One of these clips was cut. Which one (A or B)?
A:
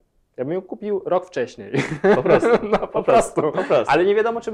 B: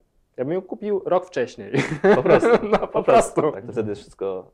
B